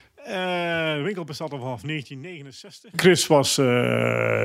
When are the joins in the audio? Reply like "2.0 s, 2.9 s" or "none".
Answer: 2.9 s